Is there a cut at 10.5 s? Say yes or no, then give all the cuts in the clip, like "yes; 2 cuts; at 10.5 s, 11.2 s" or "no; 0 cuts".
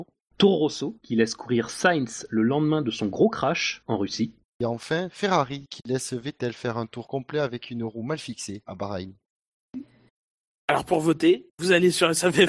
no; 0 cuts